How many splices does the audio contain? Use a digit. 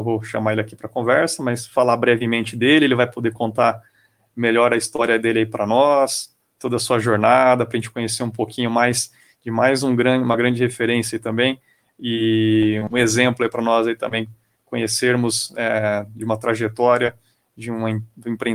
0